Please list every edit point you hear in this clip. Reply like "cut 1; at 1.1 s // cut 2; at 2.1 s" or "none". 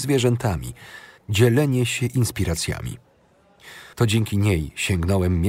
cut 1; at 1.2 s // cut 2; at 3.9 s